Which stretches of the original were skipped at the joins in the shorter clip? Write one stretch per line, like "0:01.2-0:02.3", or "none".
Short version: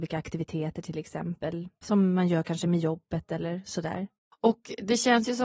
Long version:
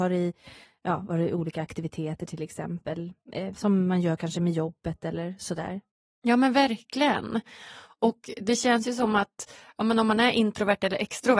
0:03.3-0:03.5
0:06.1-0:07.9

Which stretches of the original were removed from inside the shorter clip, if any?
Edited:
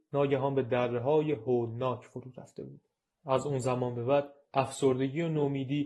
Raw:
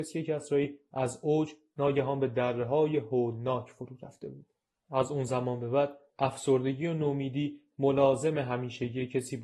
none

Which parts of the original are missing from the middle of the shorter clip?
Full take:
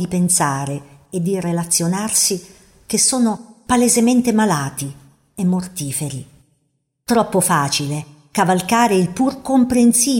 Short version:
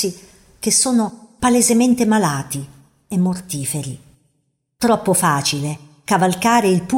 none

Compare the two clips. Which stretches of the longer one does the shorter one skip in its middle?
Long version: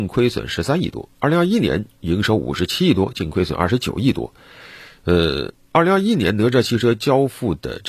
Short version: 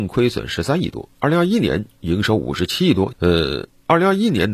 0:03.1-0:05.0

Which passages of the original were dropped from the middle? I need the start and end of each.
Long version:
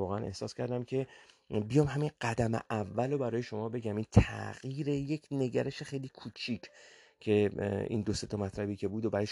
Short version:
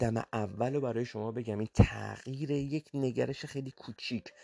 none

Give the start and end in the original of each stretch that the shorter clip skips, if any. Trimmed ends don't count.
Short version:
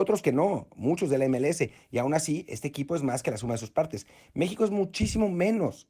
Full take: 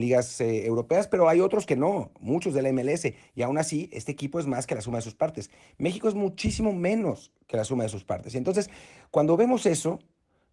none

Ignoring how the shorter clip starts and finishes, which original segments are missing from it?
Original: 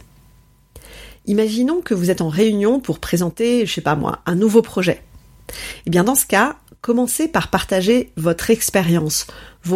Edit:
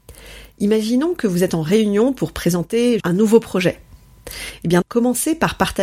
0:03.7-0:04.2
0:06.0-0:06.7

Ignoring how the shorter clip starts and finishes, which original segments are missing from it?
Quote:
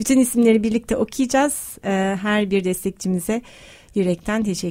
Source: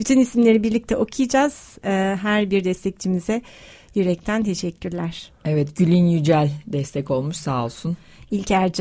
none

